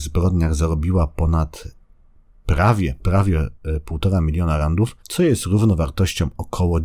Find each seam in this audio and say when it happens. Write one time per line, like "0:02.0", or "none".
0:03.0
0:05.0